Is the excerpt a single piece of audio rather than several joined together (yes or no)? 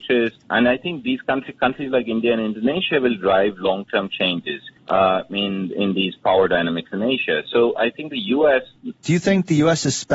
no